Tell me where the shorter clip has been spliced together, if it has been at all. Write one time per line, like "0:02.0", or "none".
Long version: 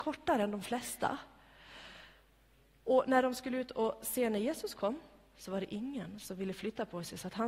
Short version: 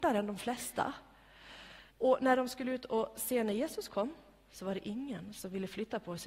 0:01.9